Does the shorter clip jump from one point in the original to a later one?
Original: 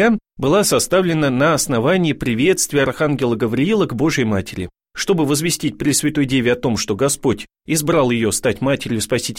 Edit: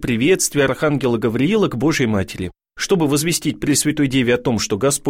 no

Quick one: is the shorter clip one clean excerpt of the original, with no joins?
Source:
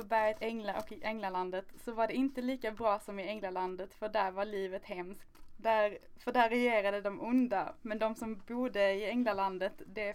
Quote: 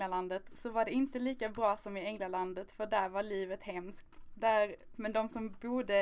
no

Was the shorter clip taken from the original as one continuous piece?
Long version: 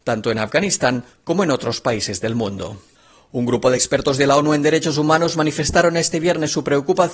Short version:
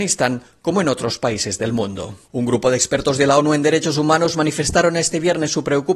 no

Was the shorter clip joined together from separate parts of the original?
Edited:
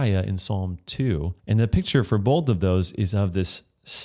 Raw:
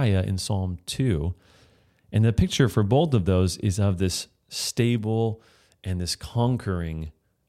yes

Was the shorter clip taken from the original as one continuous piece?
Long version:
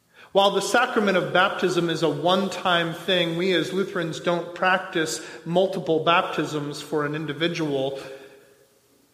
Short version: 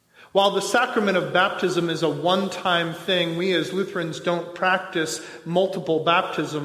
yes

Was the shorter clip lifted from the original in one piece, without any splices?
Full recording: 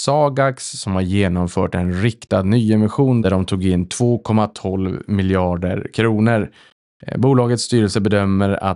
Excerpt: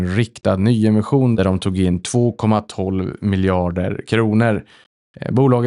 yes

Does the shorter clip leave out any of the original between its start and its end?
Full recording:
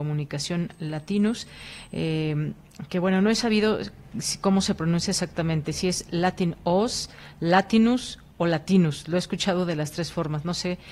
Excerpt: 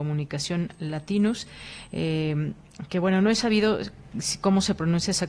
no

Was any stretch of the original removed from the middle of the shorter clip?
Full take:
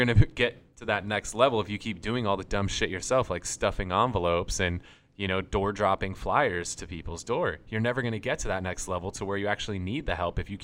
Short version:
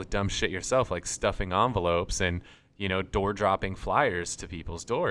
no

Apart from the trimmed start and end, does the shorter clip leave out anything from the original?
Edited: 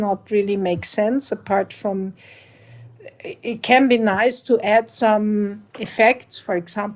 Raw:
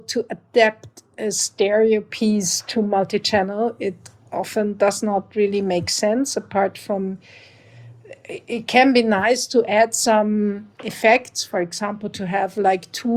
no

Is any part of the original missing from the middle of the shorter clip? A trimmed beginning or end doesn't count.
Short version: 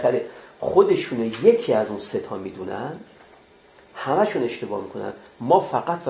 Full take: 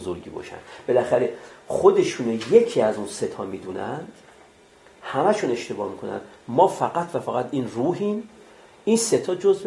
no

